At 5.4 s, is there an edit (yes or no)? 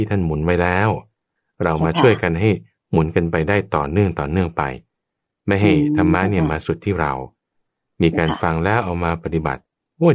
no